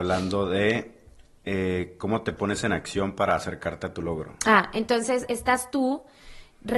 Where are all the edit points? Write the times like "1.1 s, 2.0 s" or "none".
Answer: 5.3 s